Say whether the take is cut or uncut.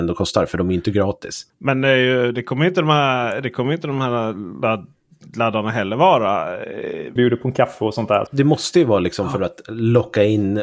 cut